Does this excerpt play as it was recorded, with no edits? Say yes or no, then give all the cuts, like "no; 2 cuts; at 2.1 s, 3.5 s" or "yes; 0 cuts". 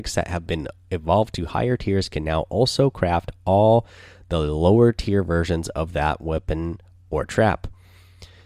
yes; 0 cuts